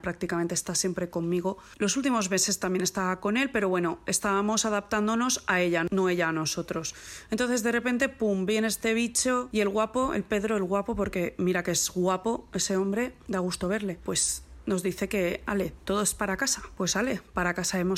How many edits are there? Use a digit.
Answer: 0